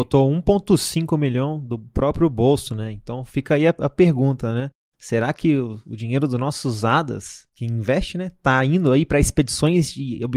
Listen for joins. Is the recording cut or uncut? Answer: uncut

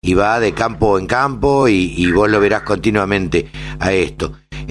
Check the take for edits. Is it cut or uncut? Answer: uncut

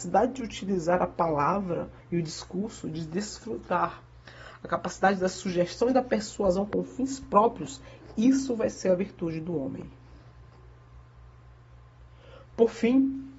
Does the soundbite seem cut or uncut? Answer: uncut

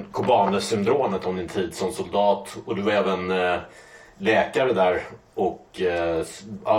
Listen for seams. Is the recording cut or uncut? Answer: uncut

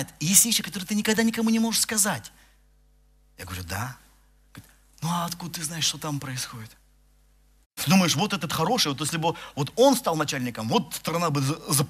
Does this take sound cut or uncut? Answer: cut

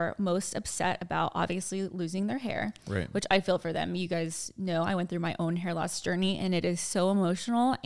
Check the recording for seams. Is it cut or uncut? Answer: uncut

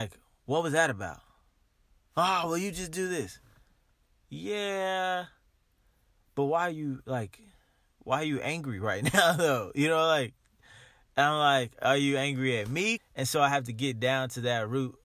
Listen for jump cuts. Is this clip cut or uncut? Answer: cut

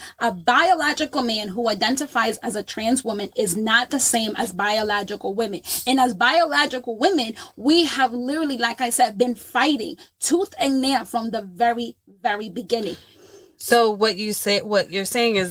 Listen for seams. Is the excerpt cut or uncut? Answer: uncut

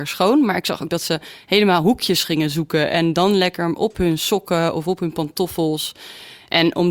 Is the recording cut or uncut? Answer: uncut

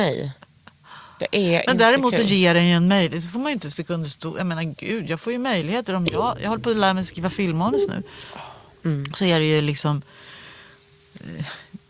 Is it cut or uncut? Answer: uncut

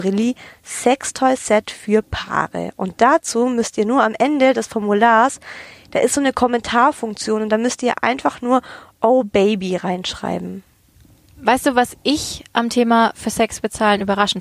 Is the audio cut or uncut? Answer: uncut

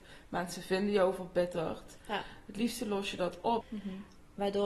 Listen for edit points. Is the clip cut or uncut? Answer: cut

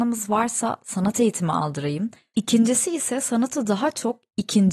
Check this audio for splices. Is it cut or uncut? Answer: cut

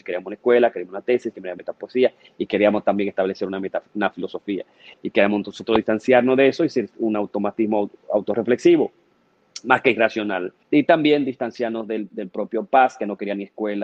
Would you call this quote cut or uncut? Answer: cut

